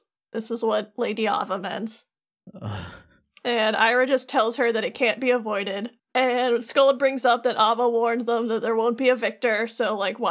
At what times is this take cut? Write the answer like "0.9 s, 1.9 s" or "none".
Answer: none